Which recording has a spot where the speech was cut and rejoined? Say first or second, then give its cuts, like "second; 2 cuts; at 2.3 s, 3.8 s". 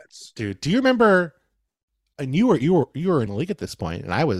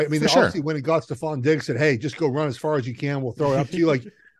first; 1 cut; at 3.3 s